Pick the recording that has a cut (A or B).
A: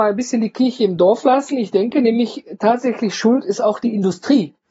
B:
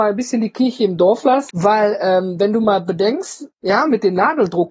B